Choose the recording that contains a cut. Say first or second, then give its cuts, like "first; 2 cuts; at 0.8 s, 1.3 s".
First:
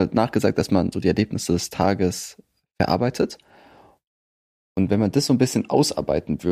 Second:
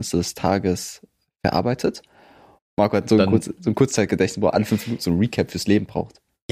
second; 1 cut; at 2.6 s